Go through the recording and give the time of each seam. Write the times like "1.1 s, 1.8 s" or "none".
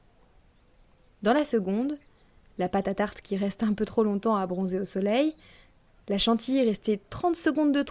none